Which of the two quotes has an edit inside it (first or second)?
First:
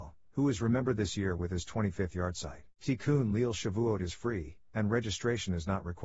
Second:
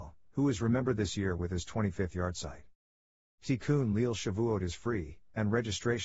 first